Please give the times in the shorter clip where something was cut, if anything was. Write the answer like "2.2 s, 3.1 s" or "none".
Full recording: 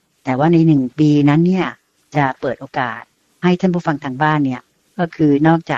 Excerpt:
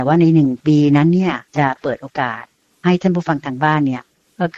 1.5 s